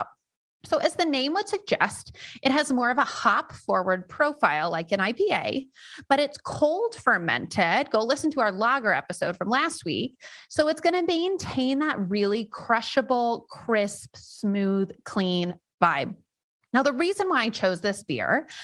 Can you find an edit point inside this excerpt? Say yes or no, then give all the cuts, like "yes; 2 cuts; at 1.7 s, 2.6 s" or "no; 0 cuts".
no; 0 cuts